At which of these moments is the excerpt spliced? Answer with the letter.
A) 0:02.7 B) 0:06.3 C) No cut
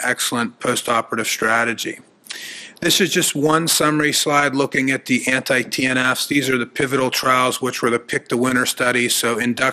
C